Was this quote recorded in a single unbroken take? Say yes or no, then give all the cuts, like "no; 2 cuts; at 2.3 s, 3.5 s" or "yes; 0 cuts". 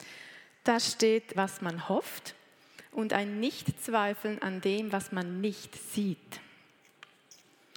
no; 1 cut; at 1.3 s